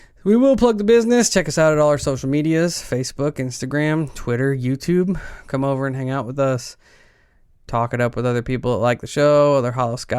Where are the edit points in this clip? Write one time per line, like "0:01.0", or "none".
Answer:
none